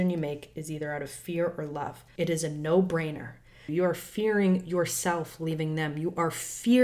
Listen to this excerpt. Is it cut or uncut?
cut